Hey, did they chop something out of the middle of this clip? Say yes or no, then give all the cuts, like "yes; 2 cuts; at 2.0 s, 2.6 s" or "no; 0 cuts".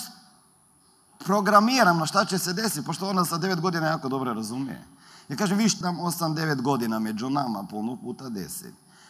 yes; 1 cut; at 5.8 s